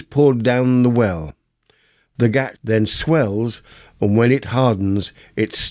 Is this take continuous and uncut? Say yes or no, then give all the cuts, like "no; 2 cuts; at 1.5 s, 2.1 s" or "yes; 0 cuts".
yes; 0 cuts